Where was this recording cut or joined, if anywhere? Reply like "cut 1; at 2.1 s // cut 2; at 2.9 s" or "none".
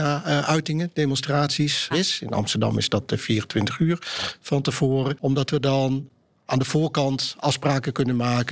cut 1; at 1.9 s

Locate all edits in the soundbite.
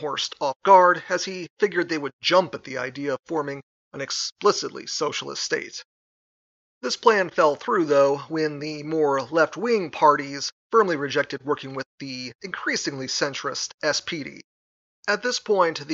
cut 1; at 6.6 s

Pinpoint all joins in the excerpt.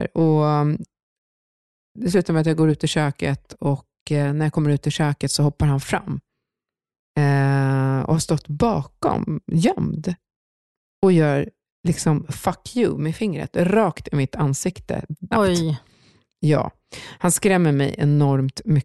cut 1; at 15.3 s

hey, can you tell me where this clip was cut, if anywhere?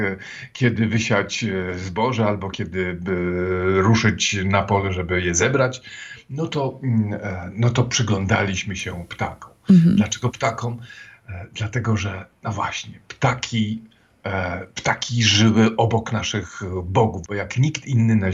cut 1; at 15.8 s // cut 2; at 17.2 s

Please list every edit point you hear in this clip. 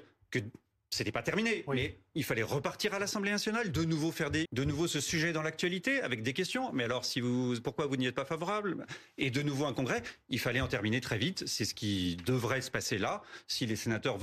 cut 1; at 4.5 s

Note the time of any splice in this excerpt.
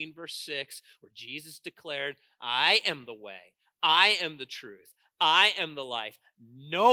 none

